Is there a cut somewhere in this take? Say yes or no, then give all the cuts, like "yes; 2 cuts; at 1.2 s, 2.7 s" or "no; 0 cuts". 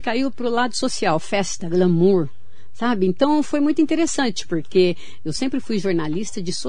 no; 0 cuts